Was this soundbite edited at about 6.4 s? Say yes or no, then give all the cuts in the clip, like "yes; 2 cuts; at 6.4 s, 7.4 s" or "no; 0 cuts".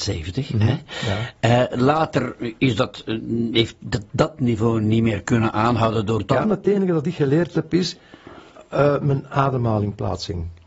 yes; 1 cut; at 6.4 s